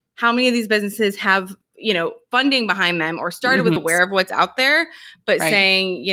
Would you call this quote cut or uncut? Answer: cut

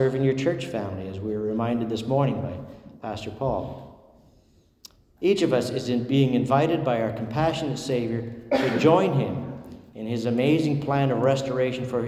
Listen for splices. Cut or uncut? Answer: uncut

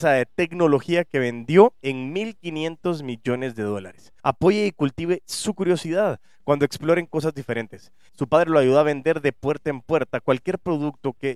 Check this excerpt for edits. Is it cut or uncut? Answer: cut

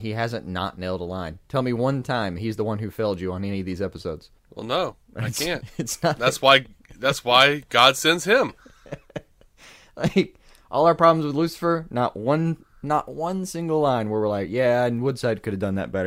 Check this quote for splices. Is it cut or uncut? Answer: uncut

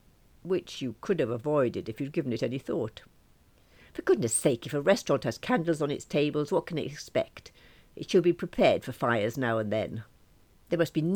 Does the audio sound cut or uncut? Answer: uncut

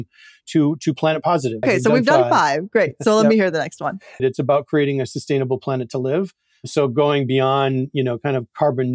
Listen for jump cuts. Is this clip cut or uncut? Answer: cut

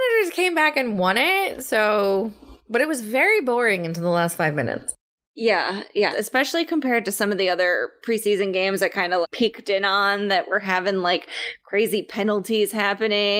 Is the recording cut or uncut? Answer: cut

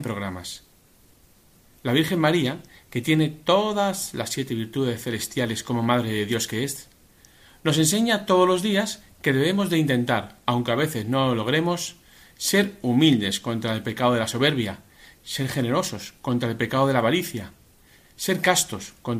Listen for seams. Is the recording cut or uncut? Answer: uncut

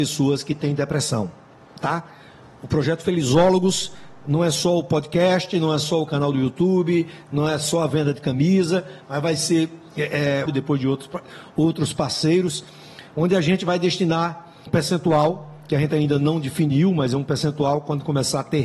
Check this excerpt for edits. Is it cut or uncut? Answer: cut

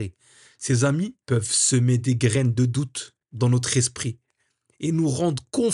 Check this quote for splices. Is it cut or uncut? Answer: cut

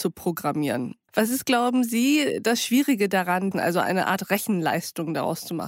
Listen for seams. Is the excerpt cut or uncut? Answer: cut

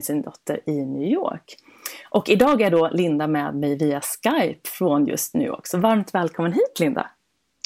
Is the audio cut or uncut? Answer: uncut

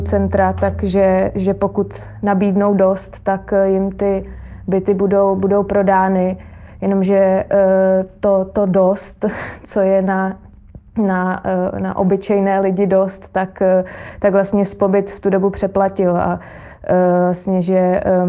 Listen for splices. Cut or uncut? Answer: uncut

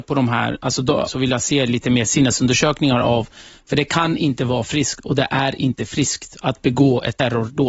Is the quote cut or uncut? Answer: cut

